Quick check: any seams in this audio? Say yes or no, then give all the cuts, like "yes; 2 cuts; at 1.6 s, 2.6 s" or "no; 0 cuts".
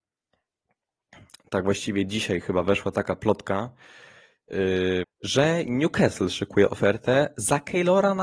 yes; 1 cut; at 5.0 s